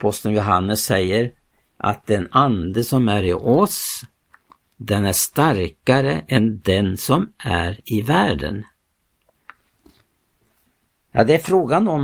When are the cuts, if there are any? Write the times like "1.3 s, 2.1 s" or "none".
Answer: none